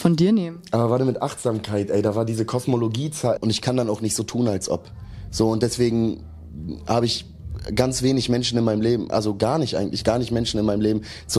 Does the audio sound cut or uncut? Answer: cut